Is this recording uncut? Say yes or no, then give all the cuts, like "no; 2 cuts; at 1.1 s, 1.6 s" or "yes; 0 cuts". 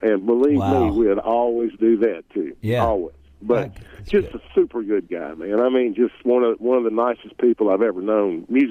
yes; 0 cuts